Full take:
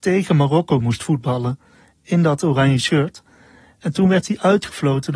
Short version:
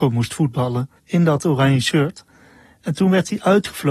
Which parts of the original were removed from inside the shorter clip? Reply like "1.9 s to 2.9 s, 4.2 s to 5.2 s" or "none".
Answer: 1.7 s to 2.0 s